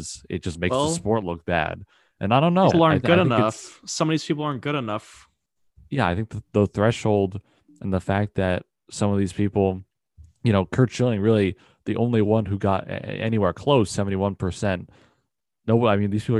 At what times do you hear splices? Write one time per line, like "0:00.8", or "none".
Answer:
0:02.7